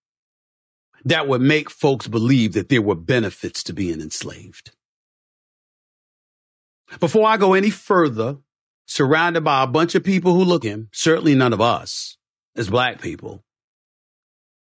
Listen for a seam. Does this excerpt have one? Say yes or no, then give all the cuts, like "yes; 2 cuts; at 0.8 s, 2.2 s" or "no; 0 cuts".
yes; 2 cuts; at 8.9 s, 10.6 s